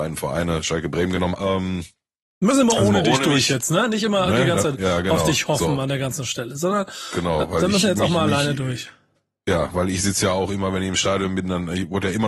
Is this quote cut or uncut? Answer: cut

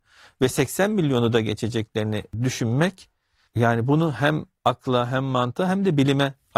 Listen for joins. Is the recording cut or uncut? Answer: uncut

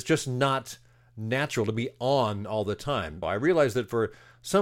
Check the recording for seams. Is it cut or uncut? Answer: cut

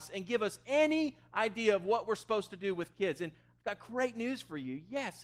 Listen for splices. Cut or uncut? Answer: uncut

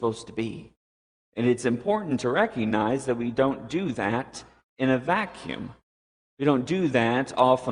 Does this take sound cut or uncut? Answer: uncut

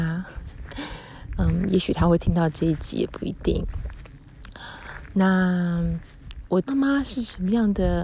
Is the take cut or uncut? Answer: cut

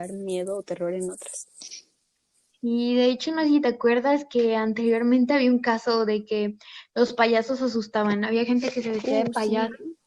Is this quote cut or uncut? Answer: uncut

